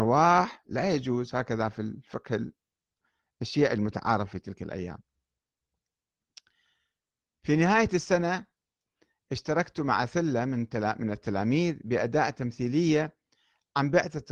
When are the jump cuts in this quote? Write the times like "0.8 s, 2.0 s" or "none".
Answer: none